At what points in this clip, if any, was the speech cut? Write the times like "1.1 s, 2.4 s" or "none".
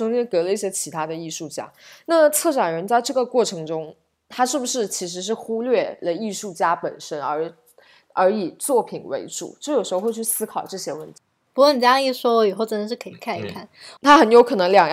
11.5 s, 14.0 s